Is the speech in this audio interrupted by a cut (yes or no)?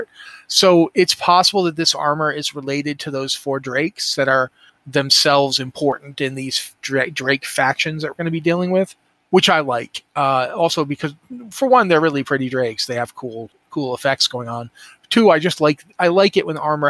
no